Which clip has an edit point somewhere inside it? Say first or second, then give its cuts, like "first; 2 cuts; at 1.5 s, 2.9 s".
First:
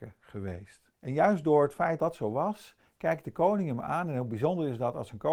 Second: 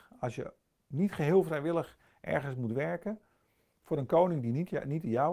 first; 2 cuts; at 0.9 s, 2.0 s